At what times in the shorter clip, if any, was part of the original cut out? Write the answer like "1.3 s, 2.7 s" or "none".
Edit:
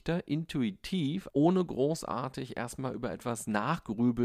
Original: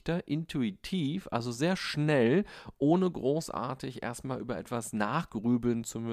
1.3 s